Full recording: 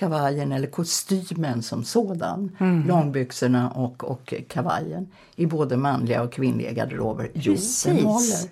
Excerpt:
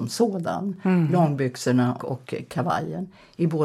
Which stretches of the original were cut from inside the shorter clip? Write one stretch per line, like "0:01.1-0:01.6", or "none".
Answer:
0:03.7-0:04.0